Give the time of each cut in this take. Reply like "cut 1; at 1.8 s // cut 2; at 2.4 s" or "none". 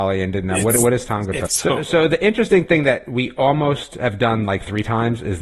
cut 1; at 1.4 s